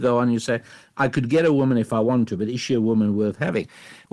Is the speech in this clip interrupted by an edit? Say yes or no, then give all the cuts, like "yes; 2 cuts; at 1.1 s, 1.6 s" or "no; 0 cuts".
no; 0 cuts